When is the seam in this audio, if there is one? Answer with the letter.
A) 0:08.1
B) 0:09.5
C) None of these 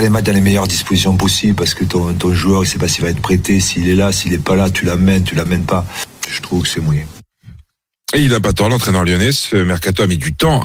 C